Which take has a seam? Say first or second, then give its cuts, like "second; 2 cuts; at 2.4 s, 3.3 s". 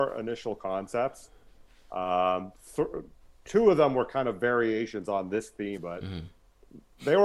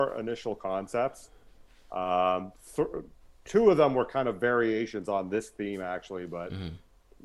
first; 1 cut; at 5.8 s